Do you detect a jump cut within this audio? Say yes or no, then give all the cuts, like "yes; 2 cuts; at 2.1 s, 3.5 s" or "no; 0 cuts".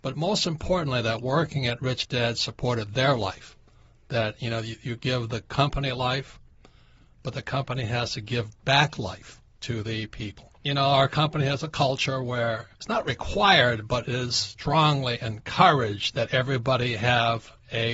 no; 0 cuts